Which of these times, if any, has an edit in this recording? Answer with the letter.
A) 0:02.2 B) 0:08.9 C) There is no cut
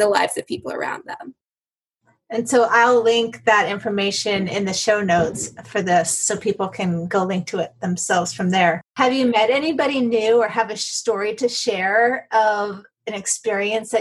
B